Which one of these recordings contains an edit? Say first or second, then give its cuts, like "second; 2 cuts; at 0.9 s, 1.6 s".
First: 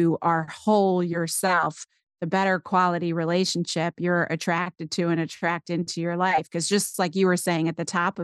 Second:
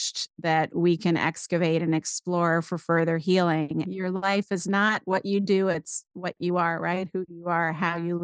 second; 1 cut; at 3.8 s